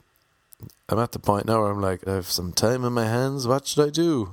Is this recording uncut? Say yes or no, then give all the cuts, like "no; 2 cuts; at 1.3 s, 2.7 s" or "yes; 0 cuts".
no; 1 cut; at 2.1 s